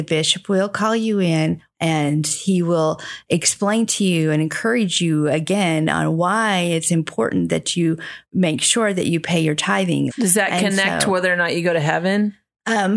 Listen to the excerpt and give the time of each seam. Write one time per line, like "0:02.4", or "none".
0:01.7
0:10.1